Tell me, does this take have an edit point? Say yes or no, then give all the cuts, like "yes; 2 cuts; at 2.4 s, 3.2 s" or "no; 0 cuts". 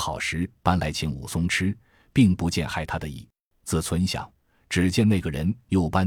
yes; 1 cut; at 3.5 s